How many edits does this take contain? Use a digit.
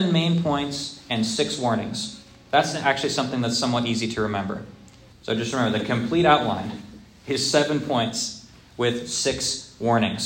1